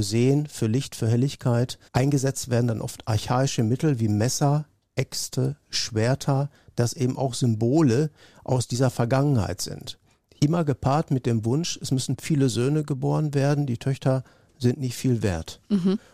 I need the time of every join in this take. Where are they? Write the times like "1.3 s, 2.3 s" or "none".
1.9 s